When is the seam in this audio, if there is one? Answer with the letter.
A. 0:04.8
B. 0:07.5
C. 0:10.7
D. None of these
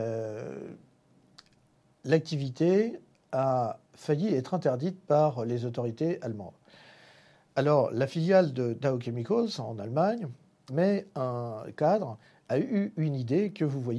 C